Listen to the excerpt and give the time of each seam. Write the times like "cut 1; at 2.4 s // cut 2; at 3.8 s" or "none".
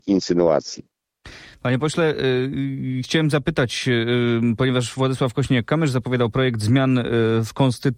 none